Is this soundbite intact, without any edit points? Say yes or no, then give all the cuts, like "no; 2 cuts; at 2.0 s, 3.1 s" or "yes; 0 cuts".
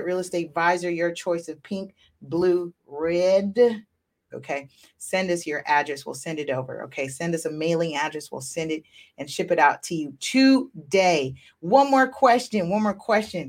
no; 1 cut; at 4.3 s